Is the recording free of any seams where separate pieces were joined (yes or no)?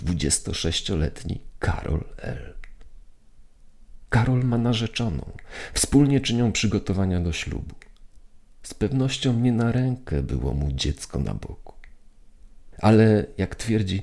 no